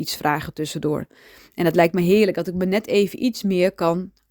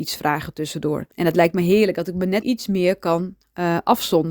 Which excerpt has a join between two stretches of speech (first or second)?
second